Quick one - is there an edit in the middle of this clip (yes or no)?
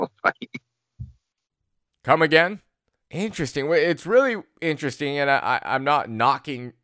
yes